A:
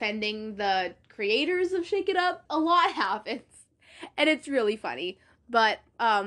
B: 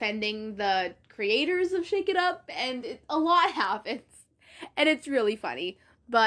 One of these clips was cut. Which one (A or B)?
A